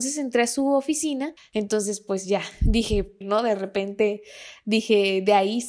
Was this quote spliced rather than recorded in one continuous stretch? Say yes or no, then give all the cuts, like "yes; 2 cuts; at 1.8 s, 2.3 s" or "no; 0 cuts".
yes; 2 cuts; at 1.4 s, 3.2 s